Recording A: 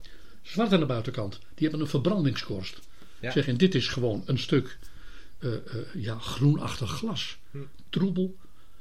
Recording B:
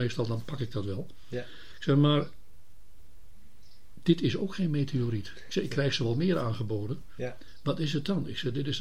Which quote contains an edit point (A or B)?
A